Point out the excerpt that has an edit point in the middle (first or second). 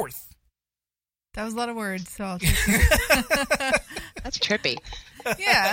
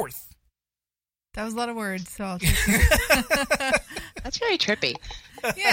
first